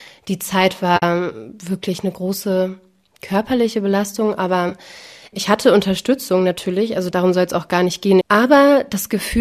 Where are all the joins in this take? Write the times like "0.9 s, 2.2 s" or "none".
8.2 s